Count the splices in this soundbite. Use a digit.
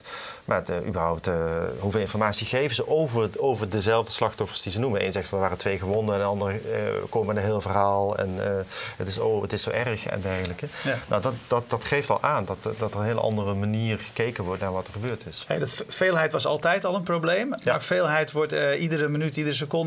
0